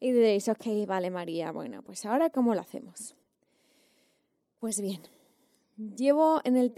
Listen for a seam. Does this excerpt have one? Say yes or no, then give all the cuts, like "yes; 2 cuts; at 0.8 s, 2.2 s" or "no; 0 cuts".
no; 0 cuts